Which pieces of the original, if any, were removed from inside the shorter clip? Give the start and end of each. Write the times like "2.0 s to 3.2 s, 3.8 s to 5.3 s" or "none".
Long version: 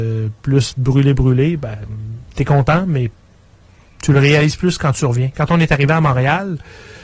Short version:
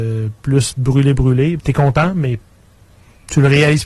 1.6 s to 2.3 s